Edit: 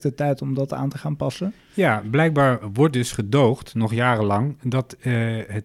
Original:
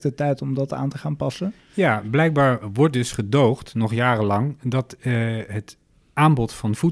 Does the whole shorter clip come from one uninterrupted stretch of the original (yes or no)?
yes